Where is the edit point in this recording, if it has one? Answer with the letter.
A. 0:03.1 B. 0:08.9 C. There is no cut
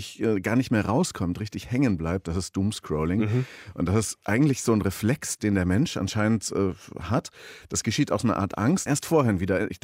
B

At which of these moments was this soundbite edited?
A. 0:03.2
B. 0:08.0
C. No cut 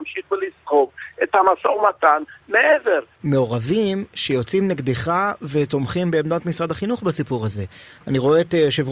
A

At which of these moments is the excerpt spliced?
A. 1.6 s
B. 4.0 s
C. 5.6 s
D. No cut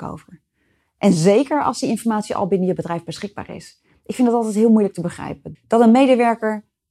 C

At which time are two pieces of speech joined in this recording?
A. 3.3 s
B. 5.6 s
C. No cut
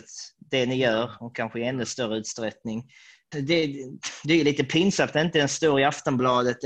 A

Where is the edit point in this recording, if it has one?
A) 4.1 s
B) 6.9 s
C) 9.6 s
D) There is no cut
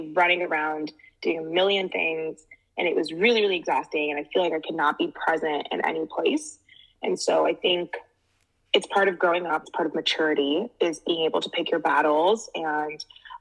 C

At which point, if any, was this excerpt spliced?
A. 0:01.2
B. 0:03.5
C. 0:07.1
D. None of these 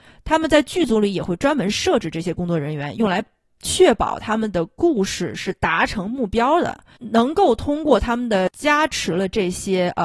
D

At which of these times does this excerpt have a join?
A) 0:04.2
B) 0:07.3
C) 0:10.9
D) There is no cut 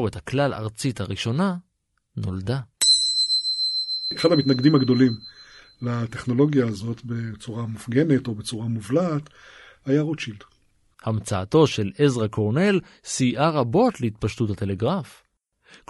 C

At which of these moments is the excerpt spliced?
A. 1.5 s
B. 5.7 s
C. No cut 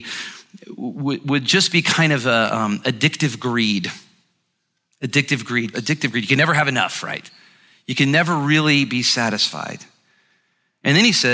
B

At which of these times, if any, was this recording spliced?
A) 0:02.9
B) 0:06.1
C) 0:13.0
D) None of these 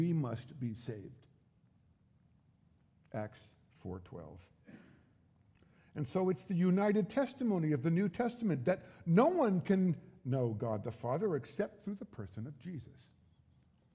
D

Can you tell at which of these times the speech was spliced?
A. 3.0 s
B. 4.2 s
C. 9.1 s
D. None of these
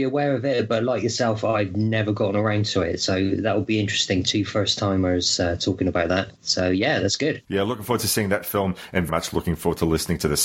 C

